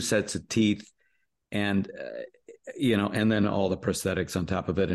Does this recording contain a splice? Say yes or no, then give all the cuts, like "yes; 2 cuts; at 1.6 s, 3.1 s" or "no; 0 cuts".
no; 0 cuts